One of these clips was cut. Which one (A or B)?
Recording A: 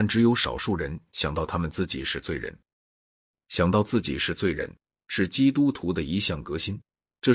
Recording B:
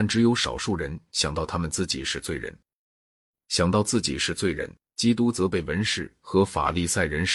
B